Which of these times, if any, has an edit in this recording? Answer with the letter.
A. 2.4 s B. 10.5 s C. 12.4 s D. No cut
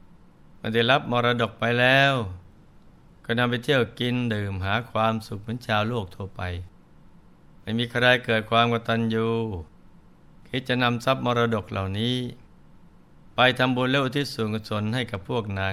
D